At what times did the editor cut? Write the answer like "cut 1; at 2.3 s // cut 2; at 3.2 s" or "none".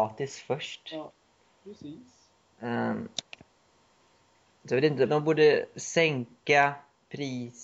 cut 1; at 5.1 s